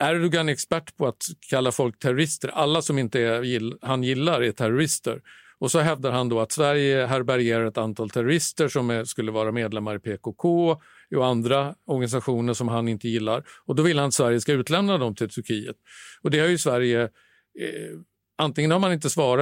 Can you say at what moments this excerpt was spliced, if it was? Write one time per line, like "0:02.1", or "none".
none